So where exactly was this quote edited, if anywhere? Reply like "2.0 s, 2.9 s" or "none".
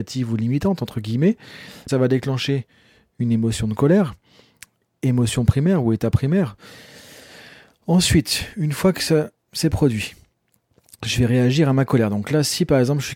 1.9 s